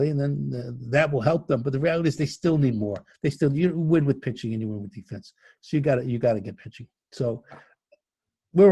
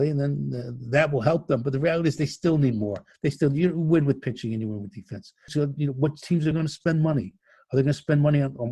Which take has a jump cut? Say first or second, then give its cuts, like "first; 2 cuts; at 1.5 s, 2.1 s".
second; 2 cuts; at 5.5 s, 6.5 s